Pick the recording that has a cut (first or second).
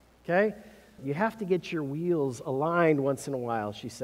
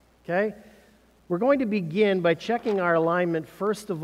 first